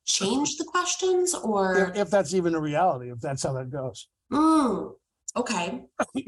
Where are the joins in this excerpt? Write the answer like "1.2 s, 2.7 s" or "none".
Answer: none